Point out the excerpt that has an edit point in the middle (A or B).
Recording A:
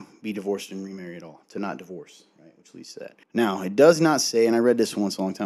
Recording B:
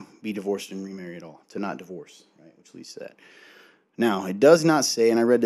A